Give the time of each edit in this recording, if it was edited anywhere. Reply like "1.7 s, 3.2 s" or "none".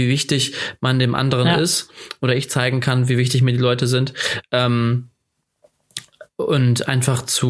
none